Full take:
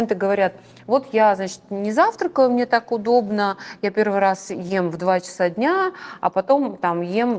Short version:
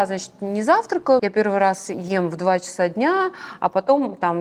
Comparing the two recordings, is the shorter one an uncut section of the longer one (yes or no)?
no